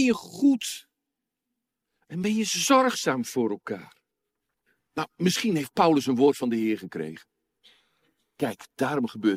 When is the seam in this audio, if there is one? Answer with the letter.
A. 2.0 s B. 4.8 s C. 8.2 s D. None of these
B